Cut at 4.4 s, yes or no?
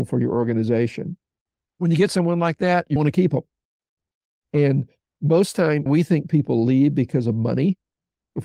no